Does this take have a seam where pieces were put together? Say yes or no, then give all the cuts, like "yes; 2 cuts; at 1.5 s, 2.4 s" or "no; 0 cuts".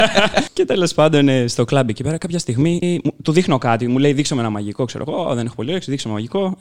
yes; 1 cut; at 2.8 s